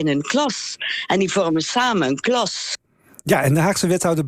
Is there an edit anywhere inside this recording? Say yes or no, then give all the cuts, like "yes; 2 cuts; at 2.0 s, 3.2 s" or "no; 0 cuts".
no; 0 cuts